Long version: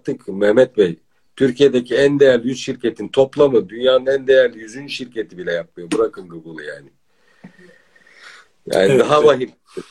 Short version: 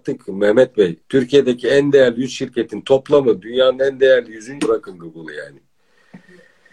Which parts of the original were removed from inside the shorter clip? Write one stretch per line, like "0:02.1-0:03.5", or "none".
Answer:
0:01.0-0:01.3
0:04.9-0:05.9